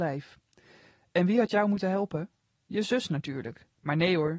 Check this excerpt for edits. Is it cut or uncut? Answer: uncut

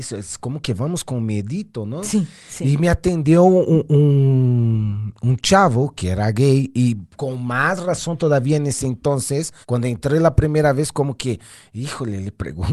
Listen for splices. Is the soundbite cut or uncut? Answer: cut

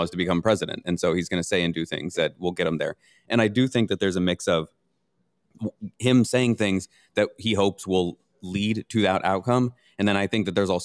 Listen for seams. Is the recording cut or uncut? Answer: uncut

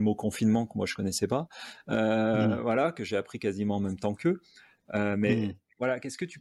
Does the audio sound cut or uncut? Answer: uncut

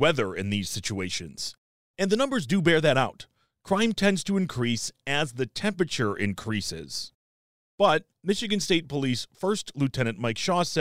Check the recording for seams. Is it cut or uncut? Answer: uncut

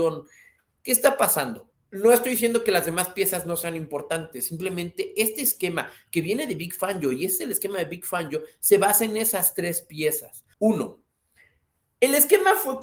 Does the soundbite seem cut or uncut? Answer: cut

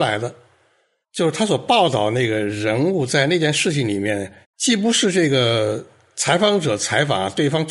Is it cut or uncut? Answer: cut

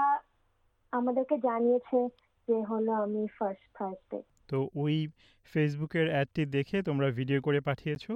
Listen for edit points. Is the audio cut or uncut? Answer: uncut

